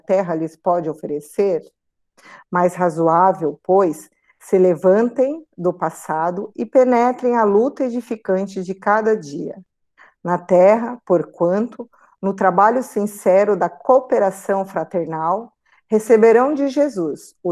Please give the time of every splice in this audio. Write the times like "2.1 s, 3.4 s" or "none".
none